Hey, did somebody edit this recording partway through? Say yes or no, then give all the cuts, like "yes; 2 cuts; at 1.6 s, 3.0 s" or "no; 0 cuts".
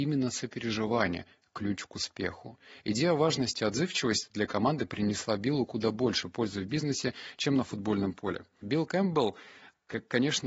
yes; 1 cut; at 8.6 s